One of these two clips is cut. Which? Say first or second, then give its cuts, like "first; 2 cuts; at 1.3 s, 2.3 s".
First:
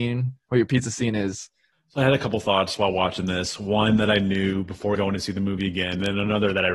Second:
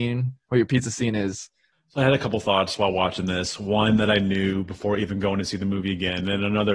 first; 1 cut; at 5.0 s